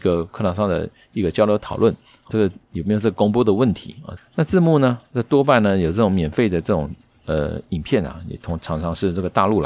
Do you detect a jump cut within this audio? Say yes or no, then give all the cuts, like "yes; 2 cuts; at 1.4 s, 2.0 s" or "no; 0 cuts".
yes; 2 cuts; at 2.3 s, 4.2 s